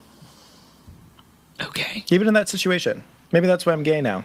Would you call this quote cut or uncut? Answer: uncut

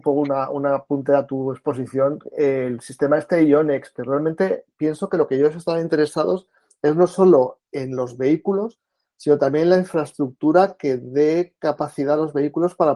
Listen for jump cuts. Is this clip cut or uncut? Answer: uncut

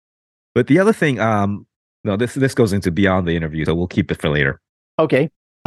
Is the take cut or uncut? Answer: cut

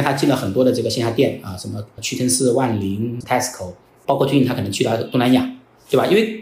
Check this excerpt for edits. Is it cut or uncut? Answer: uncut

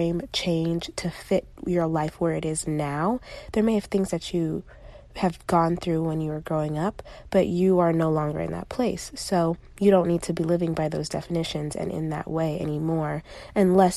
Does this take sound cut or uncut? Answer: uncut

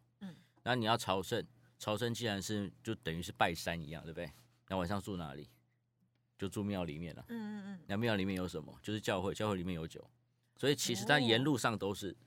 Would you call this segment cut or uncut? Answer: uncut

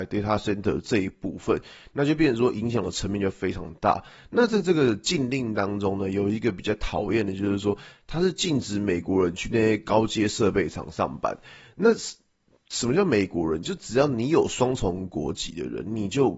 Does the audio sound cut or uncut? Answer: uncut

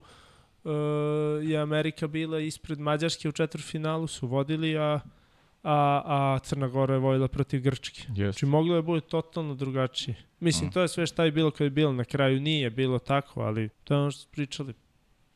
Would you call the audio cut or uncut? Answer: cut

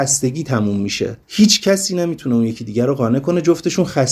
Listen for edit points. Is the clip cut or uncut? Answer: cut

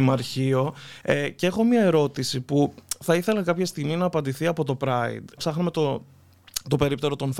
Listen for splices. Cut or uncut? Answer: cut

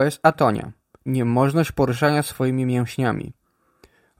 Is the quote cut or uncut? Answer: cut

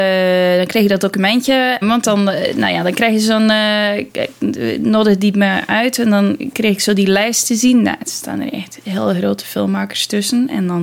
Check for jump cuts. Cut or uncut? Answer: cut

